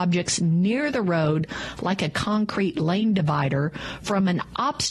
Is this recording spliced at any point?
no; 0 cuts

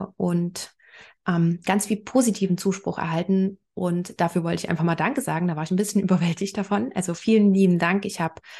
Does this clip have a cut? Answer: no; 0 cuts

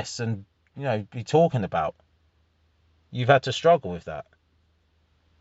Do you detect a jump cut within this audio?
no; 0 cuts

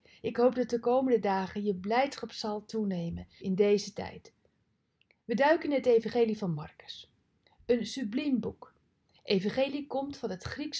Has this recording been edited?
yes; 1 cut; at 3.4 s

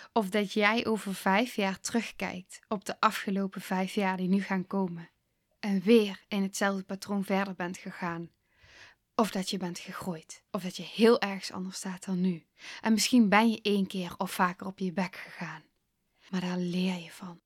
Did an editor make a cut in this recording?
yes; 2 cuts; at 9.0 s, 10.5 s

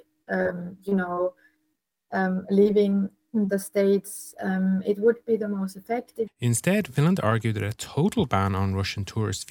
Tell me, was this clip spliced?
yes; 2 cuts; at 4.3 s, 6.3 s

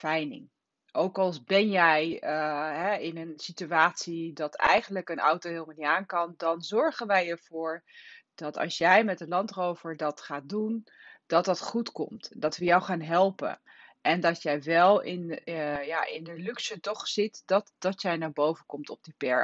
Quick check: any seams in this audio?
no; 0 cuts

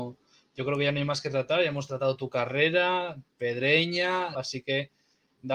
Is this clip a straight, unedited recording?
no; 1 cut; at 4.3 s

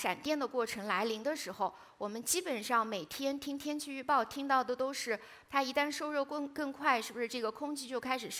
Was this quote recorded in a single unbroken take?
no; 1 cut; at 5.5 s

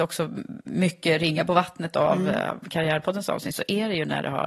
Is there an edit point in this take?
no; 0 cuts

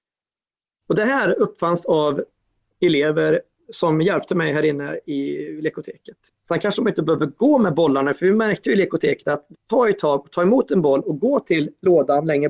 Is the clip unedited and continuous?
no; 2 cuts; at 3.6 s, 6.3 s

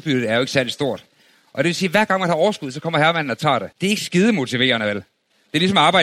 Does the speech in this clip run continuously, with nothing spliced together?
no; 1 cut; at 3.7 s

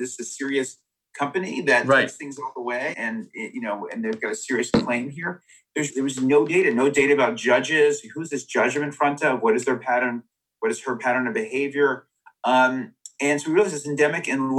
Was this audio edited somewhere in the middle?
yes; 2 cuts; at 2.9 s, 5.9 s

